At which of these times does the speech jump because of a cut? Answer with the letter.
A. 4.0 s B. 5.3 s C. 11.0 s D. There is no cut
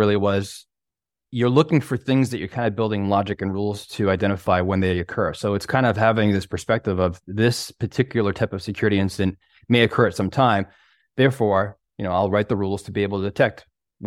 D